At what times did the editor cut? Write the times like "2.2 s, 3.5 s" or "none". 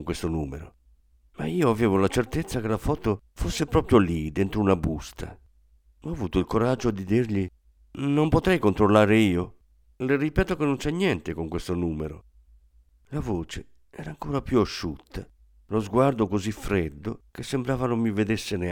none